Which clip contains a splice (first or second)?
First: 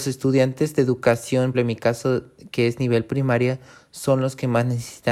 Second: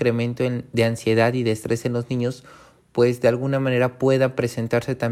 first